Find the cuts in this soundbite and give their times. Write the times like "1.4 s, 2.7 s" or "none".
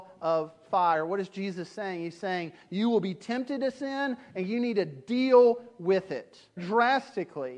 6.6 s